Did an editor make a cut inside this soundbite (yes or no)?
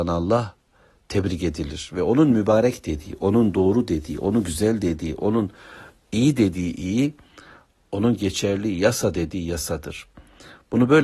no